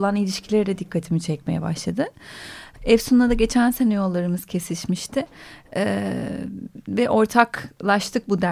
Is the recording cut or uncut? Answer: cut